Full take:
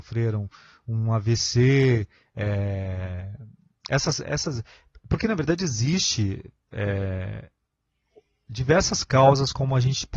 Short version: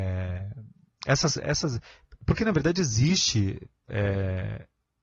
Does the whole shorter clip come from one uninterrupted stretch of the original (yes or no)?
yes